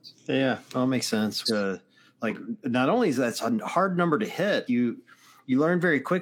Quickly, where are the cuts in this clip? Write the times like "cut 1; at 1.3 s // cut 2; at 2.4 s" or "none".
cut 1; at 1.5 s // cut 2; at 4.7 s